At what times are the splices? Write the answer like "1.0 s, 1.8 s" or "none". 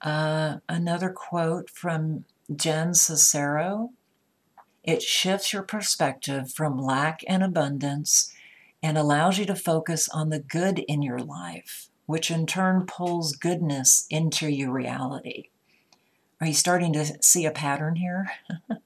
4.7 s